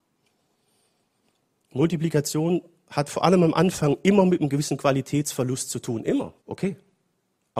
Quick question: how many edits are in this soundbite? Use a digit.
1